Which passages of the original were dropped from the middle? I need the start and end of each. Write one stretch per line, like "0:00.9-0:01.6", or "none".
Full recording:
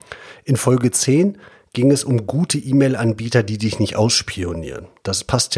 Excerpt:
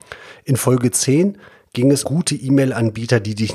0:02.0-0:02.3